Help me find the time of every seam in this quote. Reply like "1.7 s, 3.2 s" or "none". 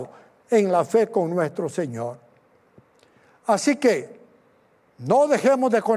none